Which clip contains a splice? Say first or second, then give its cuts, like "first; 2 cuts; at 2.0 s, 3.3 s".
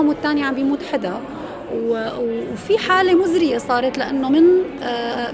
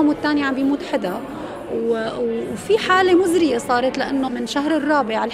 second; 1 cut; at 4.3 s